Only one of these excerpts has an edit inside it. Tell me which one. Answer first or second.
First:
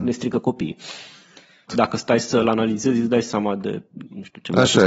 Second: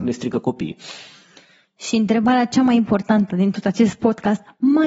first